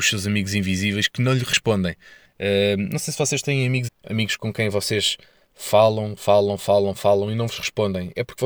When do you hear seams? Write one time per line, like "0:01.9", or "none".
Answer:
0:02.2
0:03.9